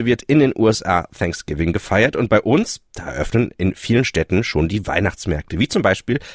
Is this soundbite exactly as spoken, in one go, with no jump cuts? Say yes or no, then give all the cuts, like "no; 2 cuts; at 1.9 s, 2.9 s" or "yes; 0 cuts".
yes; 0 cuts